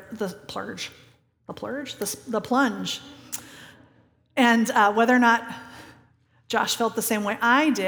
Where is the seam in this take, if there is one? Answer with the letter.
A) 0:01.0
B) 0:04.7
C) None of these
C